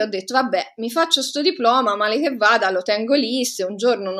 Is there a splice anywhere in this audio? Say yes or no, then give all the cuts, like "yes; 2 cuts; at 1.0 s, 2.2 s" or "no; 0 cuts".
no; 0 cuts